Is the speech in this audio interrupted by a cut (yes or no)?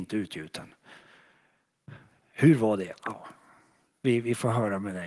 no